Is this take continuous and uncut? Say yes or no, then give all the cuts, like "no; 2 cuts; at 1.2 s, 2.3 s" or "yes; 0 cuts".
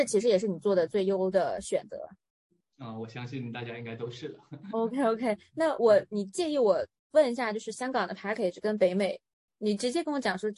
yes; 0 cuts